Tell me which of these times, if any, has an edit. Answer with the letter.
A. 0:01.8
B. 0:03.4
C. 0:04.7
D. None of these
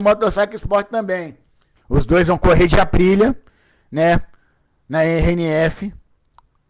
A